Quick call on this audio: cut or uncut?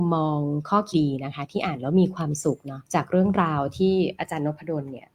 cut